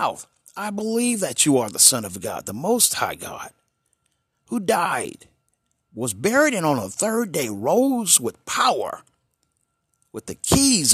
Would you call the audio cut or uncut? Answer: uncut